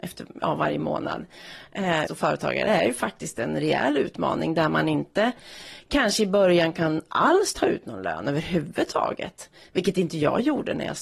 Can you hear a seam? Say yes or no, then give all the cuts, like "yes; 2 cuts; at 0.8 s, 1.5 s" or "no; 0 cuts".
yes; 1 cut; at 2.1 s